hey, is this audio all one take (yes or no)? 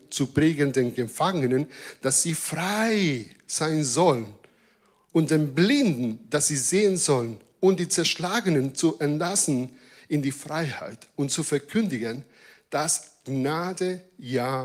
yes